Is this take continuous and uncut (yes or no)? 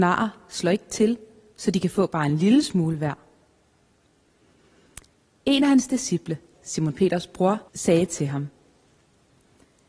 no